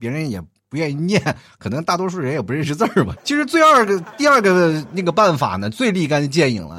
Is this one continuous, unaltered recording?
no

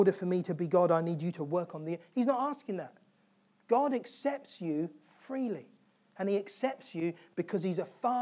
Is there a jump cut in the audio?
no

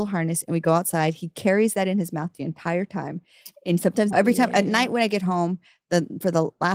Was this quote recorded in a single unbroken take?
no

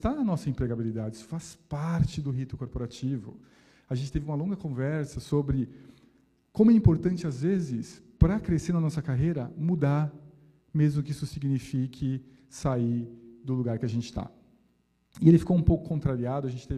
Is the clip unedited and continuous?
yes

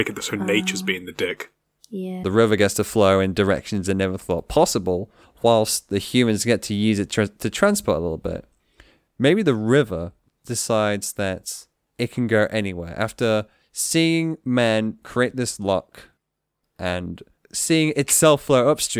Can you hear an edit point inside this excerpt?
yes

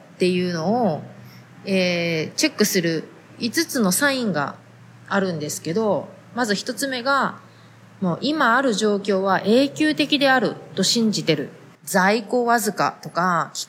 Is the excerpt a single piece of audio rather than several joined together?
no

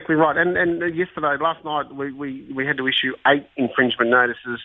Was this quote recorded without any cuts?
yes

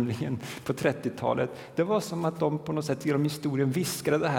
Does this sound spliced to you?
no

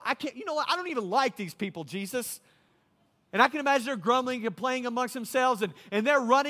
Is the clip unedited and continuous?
yes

